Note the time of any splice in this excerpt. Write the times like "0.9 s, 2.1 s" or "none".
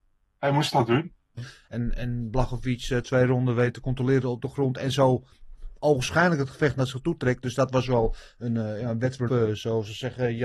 1.4 s, 9.3 s